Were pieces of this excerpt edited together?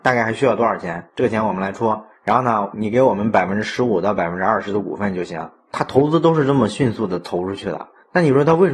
no; 0 cuts

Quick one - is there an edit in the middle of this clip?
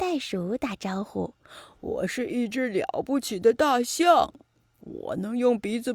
no; 0 cuts

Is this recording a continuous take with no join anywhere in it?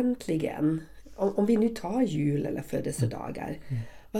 yes; 0 cuts

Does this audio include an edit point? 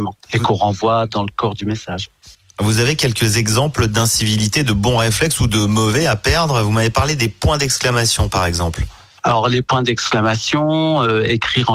no; 0 cuts

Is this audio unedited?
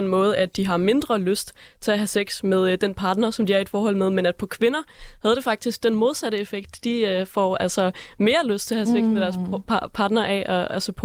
yes; 0 cuts

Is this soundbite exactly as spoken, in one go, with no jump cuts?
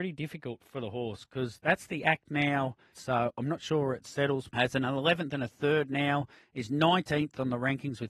no; 2 cuts; at 2.9 s, 4.5 s

